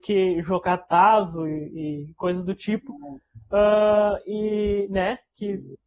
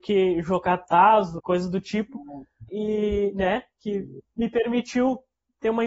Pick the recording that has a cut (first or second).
second